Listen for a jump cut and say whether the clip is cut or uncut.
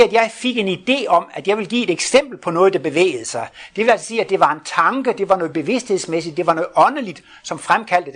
uncut